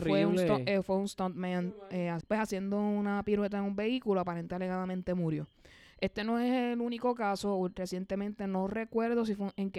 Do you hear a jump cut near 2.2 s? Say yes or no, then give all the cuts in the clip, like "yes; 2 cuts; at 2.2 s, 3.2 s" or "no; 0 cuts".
yes; 1 cut; at 2.2 s